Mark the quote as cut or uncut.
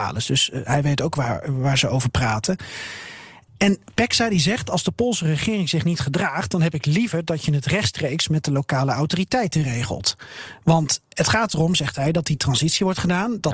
uncut